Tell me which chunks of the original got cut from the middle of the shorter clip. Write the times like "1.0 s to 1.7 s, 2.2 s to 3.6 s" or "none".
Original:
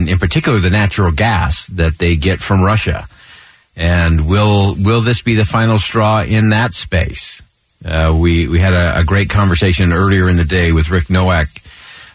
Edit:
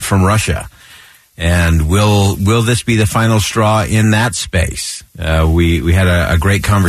7.5 s to 7.7 s